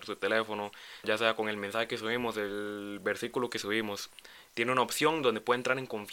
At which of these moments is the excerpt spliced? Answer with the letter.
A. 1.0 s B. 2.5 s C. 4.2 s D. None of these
A